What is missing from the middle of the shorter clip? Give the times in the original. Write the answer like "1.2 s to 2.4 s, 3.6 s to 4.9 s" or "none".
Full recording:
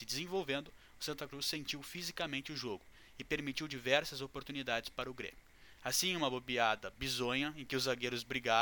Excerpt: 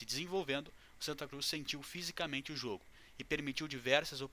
none